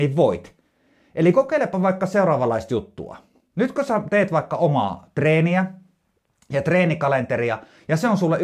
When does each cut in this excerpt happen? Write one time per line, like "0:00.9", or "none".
none

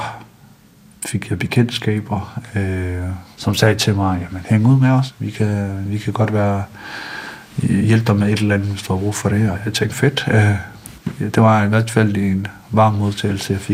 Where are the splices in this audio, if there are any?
0:04.4
0:09.9

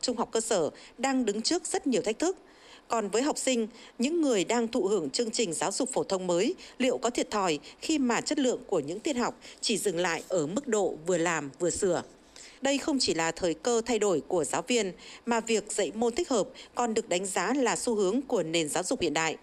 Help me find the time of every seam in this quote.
0:12.6

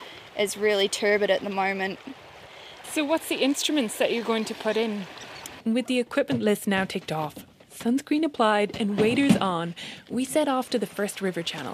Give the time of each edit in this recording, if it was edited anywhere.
0:02.8
0:05.6

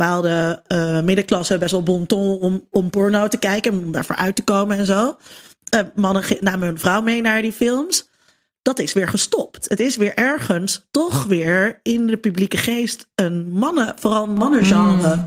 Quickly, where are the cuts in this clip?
none

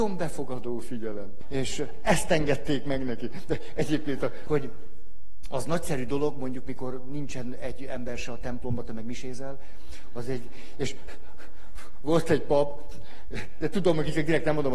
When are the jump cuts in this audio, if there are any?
0:01.4
0:04.5

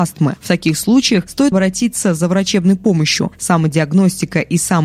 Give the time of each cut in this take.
0:01.5

